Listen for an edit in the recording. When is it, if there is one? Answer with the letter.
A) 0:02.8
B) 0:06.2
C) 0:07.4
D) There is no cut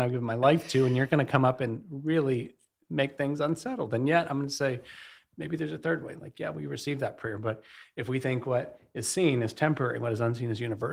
A